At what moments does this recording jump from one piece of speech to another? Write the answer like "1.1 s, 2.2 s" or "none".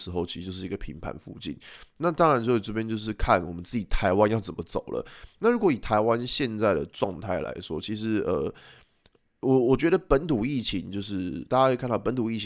none